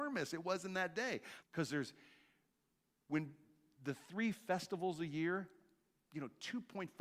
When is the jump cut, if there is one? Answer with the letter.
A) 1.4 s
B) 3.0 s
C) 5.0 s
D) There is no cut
A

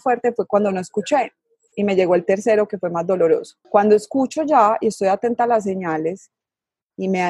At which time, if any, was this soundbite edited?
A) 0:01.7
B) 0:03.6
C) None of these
B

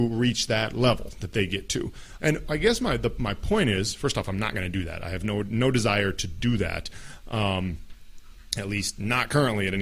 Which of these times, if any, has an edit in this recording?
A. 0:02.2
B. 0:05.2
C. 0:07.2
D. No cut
A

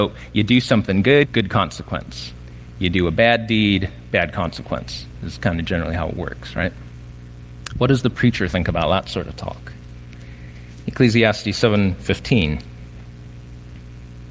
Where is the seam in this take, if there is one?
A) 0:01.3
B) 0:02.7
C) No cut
A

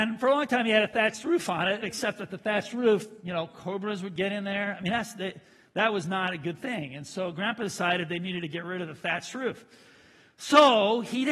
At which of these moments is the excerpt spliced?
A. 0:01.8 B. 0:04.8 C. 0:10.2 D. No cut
A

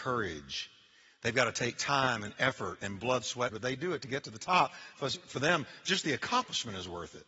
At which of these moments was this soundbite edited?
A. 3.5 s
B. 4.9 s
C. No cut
A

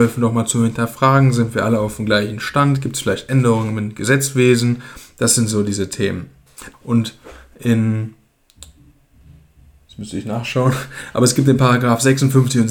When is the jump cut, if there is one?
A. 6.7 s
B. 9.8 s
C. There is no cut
A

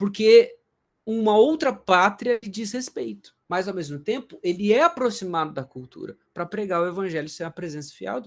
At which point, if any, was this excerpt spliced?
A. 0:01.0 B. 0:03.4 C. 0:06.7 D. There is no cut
B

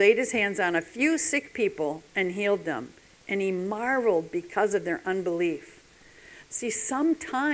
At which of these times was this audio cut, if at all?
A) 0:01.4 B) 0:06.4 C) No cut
B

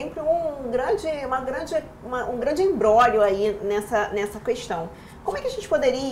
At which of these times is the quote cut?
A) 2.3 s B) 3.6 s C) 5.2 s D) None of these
D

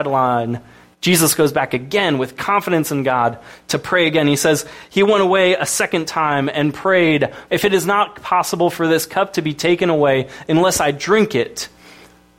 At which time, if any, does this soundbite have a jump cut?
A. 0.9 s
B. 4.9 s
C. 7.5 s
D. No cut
C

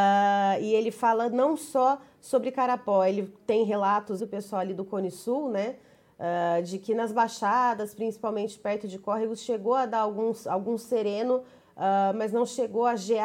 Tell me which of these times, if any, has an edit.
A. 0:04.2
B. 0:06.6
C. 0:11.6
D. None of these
A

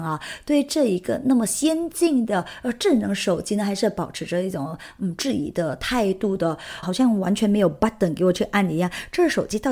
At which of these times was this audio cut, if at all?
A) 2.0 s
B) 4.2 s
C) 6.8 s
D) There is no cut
C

